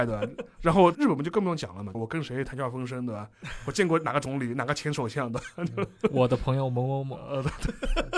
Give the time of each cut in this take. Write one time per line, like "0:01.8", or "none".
0:00.9
0:01.9